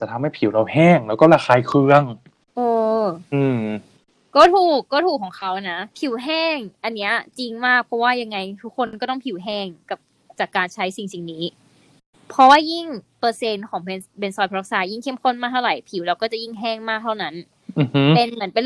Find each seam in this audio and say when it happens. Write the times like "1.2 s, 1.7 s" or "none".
5.9 s